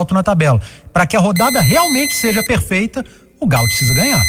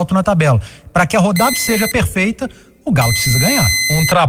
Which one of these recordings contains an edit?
second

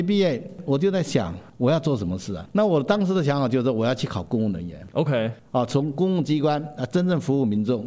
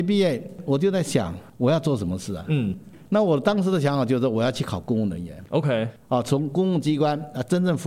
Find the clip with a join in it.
first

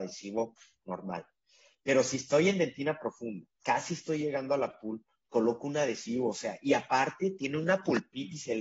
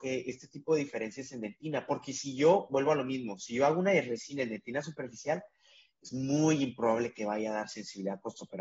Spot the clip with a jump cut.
first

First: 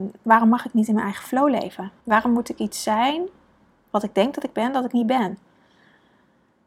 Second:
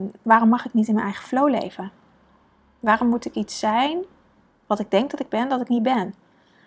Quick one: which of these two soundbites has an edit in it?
first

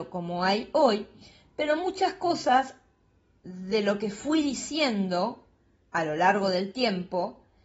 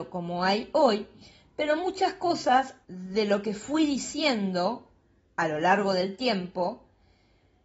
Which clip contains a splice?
second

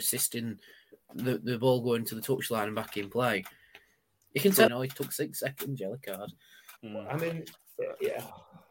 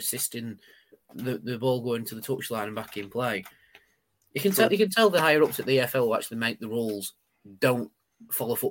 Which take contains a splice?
first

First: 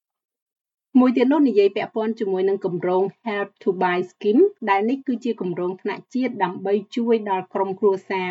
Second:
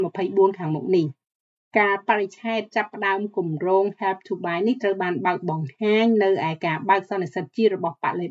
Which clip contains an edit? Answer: first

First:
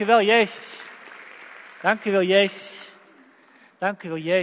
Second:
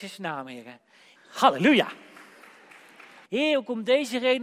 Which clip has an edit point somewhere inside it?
second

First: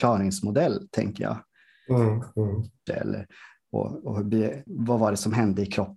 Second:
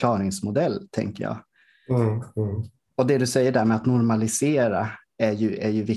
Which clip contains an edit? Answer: first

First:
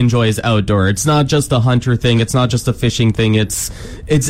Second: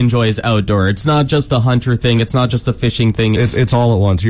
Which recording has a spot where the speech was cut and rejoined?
second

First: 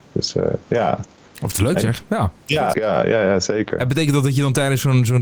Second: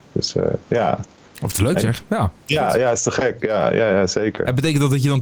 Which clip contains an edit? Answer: first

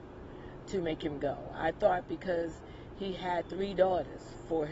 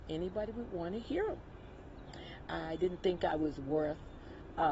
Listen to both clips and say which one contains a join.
second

